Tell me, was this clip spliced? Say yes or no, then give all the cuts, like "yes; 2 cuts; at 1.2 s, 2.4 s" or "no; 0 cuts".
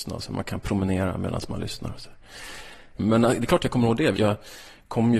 yes; 1 cut; at 4.1 s